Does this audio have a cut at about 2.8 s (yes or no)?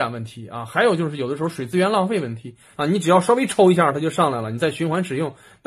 yes